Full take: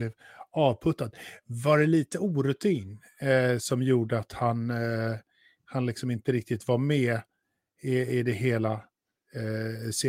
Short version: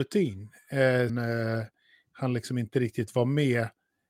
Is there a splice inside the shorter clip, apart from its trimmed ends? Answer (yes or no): yes